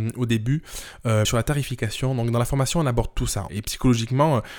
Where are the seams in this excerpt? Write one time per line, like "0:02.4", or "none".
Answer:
0:01.2
0:03.5